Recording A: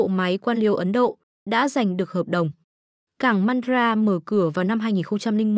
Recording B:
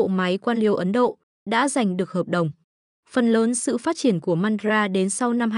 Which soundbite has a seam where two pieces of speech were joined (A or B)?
B